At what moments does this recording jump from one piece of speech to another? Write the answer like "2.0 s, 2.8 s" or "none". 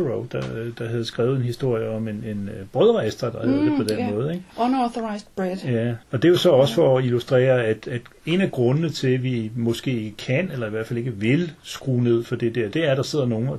6.0 s